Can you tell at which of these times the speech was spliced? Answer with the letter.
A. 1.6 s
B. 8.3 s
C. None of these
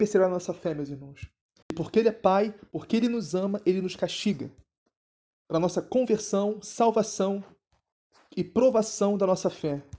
A